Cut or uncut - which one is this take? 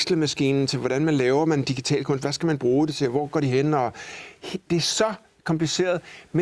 cut